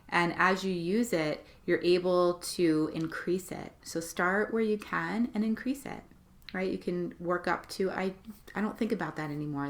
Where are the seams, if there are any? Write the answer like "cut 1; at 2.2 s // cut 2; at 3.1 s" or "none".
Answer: none